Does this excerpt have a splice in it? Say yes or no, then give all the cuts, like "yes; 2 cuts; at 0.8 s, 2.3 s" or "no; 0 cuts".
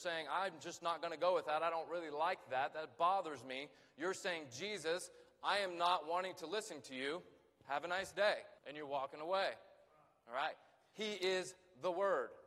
yes; 1 cut; at 8.6 s